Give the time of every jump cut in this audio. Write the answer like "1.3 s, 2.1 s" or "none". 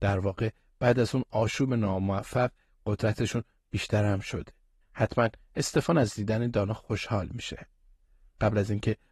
4.8 s